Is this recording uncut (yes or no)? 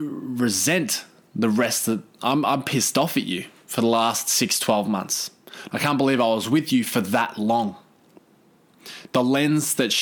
no